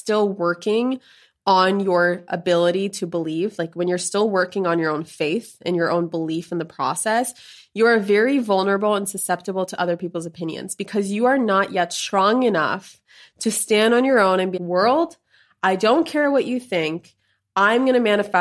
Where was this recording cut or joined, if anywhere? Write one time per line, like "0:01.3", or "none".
0:14.6